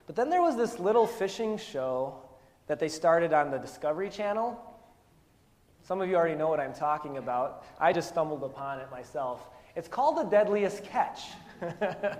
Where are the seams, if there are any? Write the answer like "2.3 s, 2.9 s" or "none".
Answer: none